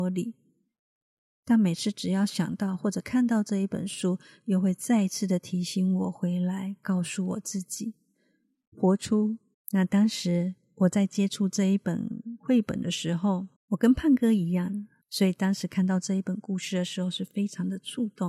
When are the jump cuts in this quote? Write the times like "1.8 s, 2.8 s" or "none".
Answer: 9.5 s, 13.6 s, 15.0 s